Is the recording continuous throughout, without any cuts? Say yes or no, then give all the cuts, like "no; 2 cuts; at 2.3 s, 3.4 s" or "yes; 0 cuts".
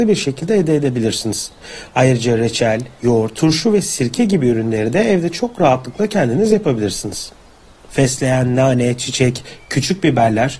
no; 2 cuts; at 3.3 s, 7.9 s